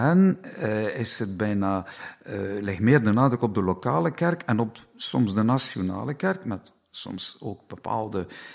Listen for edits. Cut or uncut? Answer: uncut